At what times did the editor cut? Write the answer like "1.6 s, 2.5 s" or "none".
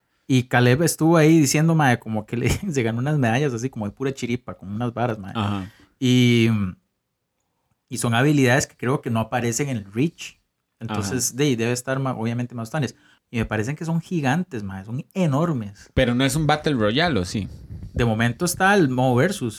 13.2 s